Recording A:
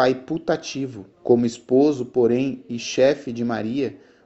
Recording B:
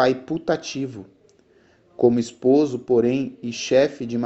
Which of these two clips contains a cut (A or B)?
A